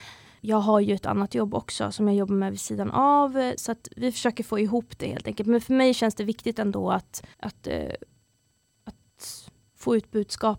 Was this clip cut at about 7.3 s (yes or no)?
yes